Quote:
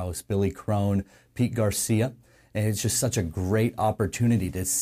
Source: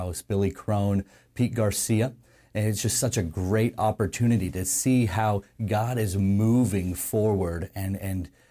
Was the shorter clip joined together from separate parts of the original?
no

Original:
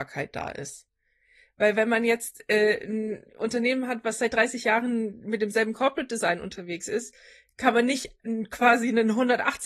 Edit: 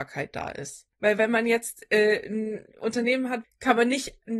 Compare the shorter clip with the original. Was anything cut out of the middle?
yes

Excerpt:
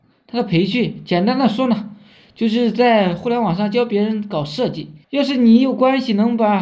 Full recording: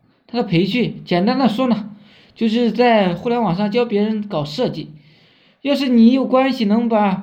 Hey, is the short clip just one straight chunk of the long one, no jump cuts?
no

